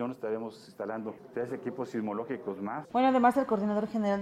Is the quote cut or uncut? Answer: cut